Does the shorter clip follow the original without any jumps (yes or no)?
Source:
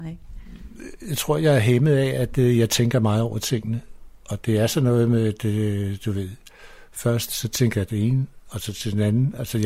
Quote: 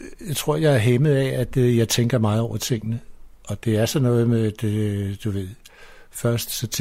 yes